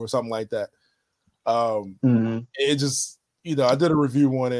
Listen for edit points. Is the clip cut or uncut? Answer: uncut